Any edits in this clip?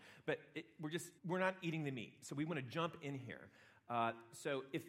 yes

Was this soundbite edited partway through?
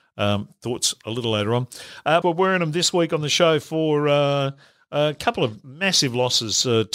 yes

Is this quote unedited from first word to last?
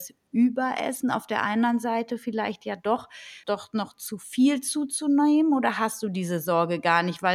no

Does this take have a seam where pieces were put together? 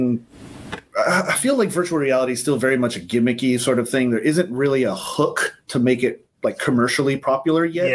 no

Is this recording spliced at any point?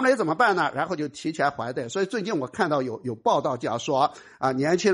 no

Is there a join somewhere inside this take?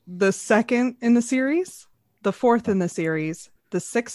no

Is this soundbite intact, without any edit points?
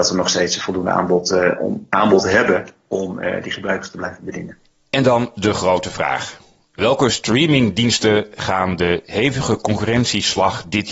yes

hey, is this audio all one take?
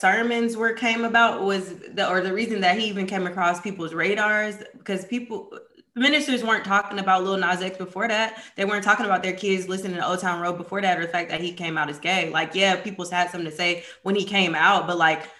yes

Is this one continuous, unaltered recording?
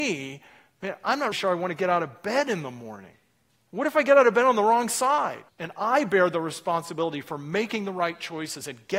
no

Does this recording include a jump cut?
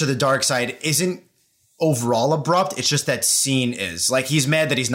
no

